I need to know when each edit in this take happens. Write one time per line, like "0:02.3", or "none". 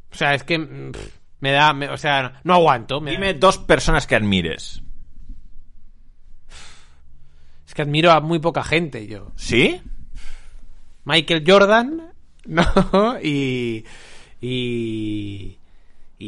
none